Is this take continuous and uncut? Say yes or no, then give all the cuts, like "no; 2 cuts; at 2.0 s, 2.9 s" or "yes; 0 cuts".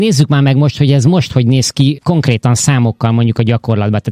no; 1 cut; at 2.0 s